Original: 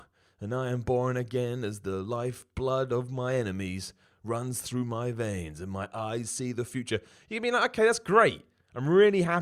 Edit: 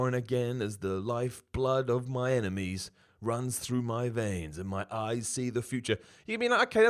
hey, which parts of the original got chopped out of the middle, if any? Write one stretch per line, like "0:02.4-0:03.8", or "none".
none